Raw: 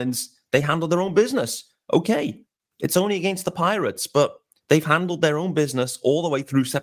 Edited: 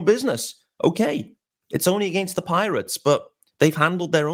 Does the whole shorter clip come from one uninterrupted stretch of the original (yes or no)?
yes